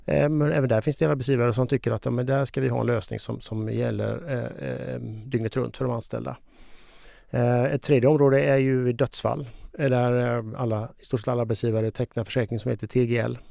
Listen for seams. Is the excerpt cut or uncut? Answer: uncut